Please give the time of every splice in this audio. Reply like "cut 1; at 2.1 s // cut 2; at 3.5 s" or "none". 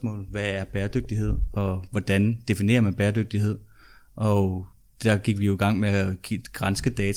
none